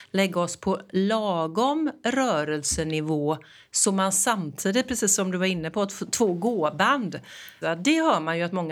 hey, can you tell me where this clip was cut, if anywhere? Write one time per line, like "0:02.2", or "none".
0:07.6